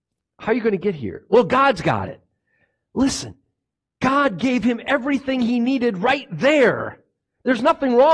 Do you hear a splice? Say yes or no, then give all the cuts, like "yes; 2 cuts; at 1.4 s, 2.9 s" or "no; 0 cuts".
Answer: no; 0 cuts